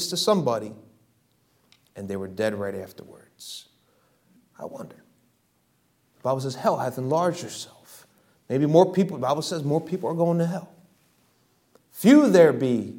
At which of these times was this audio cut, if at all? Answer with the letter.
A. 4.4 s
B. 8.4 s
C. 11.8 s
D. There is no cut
A